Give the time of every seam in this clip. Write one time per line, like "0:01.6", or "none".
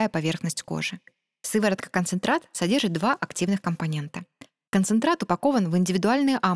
0:04.7